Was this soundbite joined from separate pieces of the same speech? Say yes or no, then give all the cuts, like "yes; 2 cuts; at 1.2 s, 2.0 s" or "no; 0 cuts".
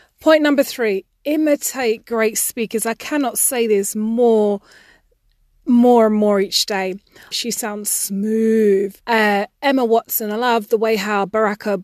yes; 2 cuts; at 7.3 s, 9.0 s